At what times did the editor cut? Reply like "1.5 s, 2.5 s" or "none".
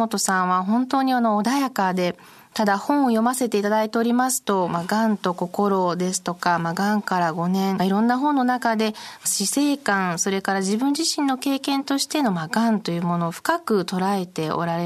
7.8 s